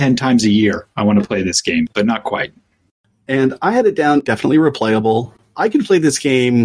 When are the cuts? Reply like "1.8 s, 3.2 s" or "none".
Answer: 1.9 s